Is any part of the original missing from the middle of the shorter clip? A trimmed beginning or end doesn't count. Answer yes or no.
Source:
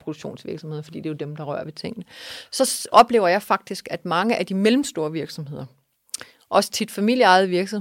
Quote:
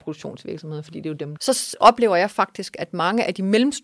yes